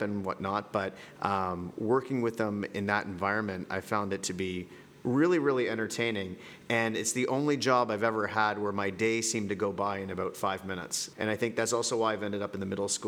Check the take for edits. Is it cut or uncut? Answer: cut